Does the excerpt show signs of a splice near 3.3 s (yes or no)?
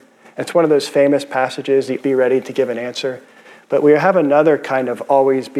no